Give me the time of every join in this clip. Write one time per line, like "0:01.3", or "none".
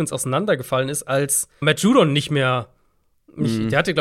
0:01.6